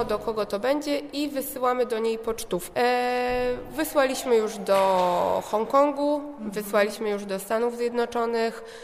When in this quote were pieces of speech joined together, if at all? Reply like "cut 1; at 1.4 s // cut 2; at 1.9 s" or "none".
cut 1; at 2.7 s